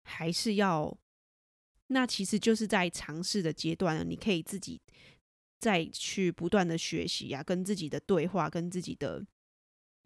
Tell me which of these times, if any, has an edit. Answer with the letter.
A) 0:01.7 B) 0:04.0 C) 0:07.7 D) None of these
A